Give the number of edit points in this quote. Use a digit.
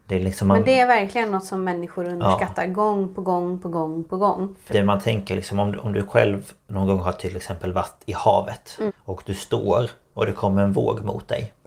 2